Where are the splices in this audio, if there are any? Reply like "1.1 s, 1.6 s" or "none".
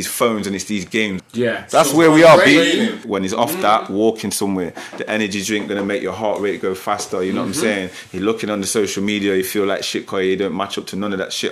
1.2 s, 3.0 s